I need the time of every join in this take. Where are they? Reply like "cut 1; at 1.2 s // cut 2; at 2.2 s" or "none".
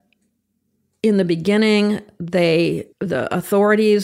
cut 1; at 2.9 s